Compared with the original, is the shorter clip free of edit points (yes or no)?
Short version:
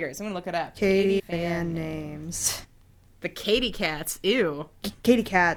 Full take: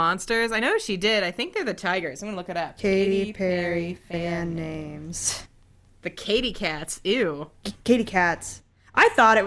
no